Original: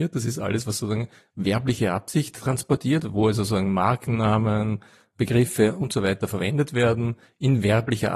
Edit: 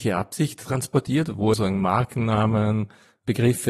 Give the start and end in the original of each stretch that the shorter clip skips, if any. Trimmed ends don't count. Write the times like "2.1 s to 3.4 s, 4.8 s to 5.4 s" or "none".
3.3 s to 3.5 s